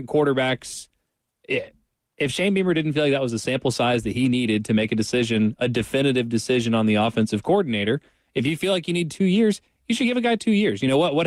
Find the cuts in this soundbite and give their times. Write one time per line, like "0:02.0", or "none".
none